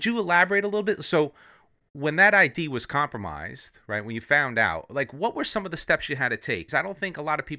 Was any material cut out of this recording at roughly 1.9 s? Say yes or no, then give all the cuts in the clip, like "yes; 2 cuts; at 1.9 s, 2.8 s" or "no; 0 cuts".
no; 1 cut; at 6.7 s